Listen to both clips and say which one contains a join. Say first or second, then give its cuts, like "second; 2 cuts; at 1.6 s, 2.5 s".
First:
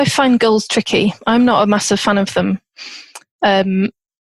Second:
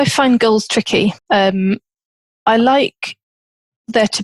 second; 1 cut; at 1.2 s